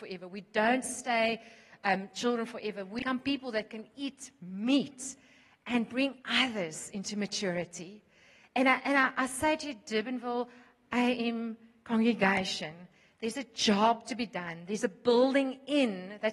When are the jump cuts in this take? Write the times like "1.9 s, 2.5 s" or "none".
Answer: none